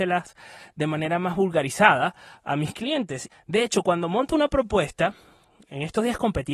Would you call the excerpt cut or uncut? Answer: cut